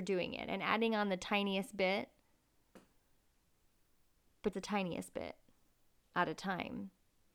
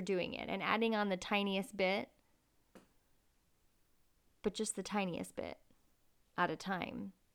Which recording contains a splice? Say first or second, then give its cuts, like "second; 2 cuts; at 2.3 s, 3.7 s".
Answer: first; 1 cut; at 4.5 s